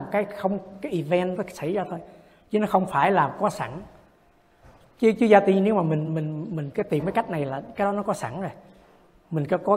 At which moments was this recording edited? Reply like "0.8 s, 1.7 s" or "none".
none